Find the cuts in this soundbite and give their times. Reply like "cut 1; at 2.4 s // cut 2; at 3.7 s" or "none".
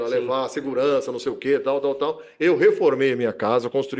none